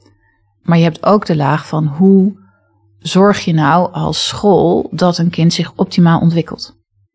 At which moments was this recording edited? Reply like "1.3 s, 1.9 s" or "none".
none